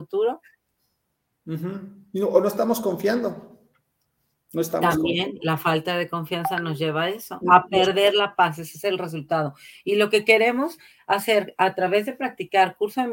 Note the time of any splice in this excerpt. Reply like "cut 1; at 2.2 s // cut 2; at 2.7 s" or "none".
cut 1; at 7.4 s